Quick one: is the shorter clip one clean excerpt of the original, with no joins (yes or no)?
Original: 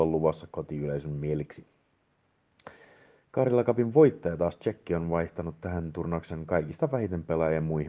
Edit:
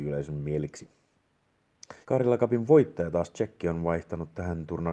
no